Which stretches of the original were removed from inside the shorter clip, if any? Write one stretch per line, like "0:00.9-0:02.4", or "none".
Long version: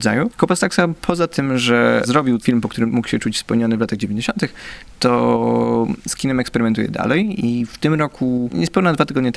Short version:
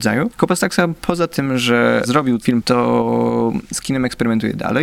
0:02.6-0:05.0

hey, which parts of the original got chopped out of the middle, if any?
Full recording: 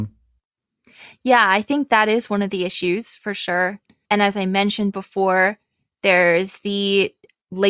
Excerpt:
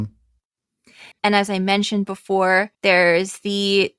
0:01.1-0:04.0
0:05.6-0:05.9

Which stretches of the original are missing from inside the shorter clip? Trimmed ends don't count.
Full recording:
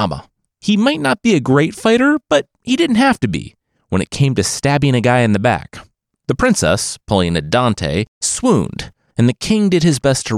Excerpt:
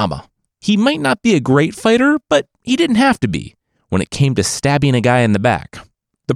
none

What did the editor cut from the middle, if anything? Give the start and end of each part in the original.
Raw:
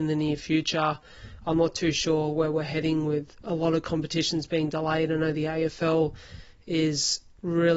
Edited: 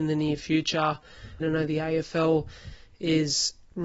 0:01.4-0:05.1

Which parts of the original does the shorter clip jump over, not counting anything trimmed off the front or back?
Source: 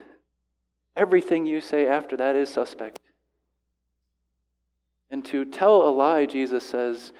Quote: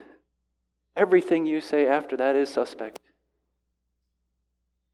none

